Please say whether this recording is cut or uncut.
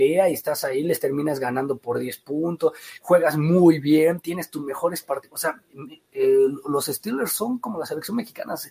uncut